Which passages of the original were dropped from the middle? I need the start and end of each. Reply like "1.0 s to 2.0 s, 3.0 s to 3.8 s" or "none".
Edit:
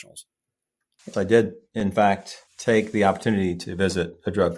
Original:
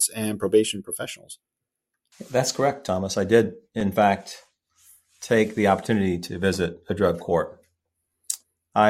2.3 s to 3.1 s, 4.5 s to 5.1 s